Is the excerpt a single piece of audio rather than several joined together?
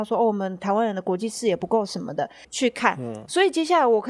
no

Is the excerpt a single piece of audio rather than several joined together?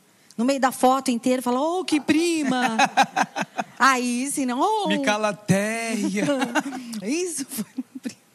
no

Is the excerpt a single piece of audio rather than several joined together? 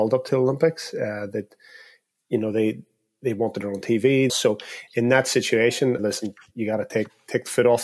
no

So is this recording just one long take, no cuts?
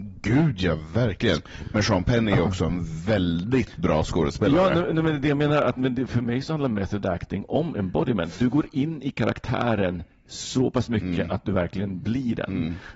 no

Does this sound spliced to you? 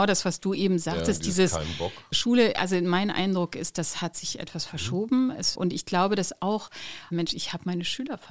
yes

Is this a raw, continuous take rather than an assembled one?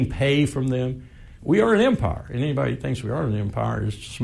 no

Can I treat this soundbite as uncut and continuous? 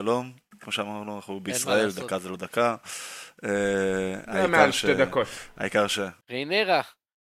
no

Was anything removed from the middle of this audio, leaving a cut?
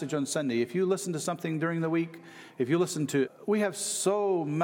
yes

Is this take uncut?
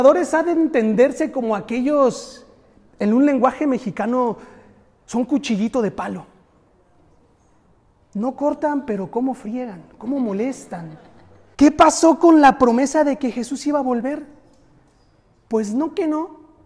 no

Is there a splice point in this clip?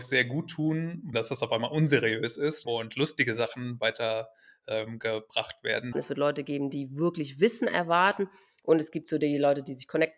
yes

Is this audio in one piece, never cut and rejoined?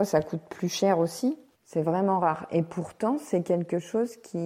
no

